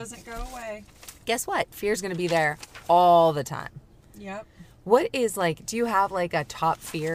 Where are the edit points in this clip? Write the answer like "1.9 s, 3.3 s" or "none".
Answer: none